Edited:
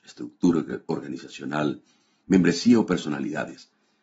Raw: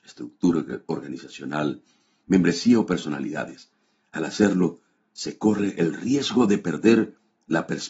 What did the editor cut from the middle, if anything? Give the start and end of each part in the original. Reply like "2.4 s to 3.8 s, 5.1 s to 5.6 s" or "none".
none